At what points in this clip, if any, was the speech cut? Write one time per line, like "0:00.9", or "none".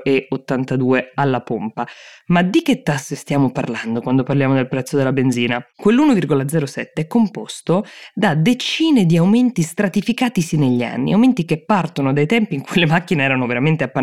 0:02.2